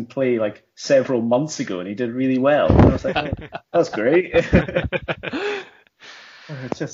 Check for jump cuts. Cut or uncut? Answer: uncut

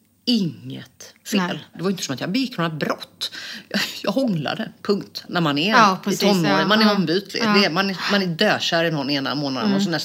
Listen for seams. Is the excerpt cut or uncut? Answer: cut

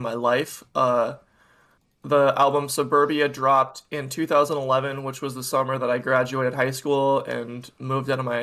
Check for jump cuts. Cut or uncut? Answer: uncut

